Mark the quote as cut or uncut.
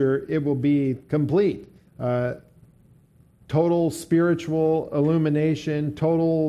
cut